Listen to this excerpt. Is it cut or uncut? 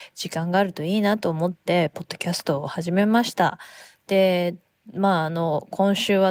uncut